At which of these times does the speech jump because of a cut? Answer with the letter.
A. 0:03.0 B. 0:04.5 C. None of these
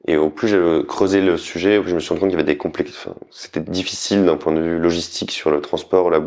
C